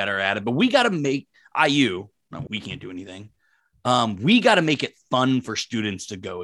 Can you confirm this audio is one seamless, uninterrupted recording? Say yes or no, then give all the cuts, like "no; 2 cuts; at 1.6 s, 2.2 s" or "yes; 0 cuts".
no; 1 cut; at 2.5 s